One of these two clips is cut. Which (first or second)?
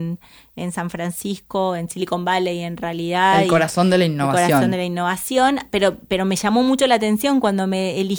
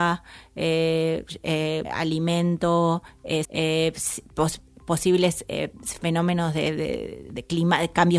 second